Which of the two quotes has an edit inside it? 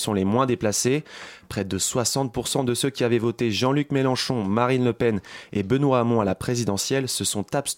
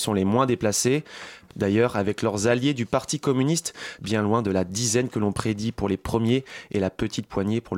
second; 2 cuts; at 1.5 s, 4.0 s

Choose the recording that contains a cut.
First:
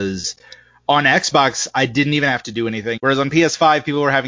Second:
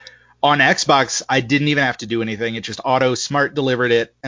first; 1 cut; at 3.0 s

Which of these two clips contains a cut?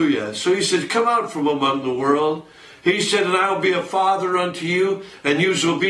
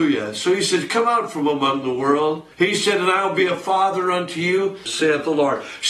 second; 2 cuts; at 2.5 s, 4.9 s

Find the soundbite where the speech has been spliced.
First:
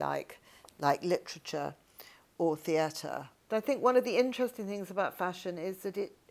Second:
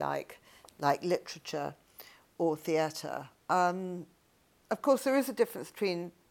first; 1 cut; at 3.4 s

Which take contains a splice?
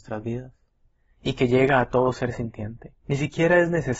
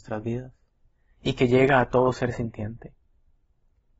first; 1 cut; at 3.0 s

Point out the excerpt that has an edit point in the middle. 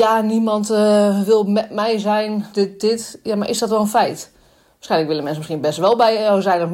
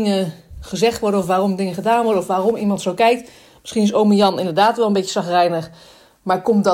first; 1 cut; at 2.5 s

